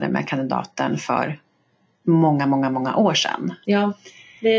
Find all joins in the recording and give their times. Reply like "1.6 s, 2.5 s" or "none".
3.6 s